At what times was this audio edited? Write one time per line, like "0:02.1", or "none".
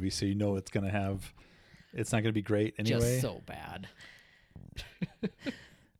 none